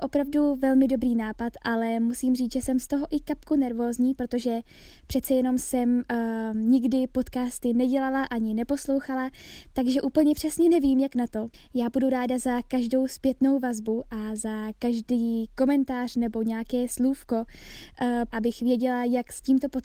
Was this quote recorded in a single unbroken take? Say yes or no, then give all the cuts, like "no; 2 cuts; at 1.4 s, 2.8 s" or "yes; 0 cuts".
no; 2 cuts; at 11.5 s, 18.3 s